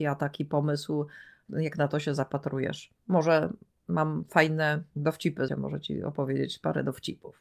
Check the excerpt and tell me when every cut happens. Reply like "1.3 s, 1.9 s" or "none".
3.0 s, 5.5 s